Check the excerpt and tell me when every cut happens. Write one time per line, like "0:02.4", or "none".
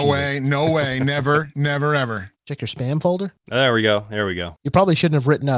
none